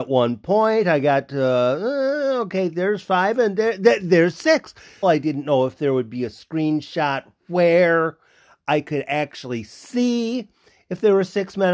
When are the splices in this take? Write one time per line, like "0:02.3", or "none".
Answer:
0:05.0